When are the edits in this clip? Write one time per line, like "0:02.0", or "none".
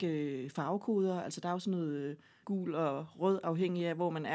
0:02.4